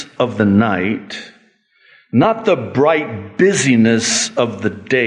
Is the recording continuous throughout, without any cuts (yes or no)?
yes